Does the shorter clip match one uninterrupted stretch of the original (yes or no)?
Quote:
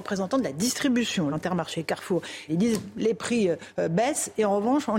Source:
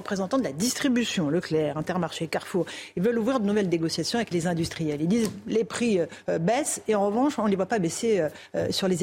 no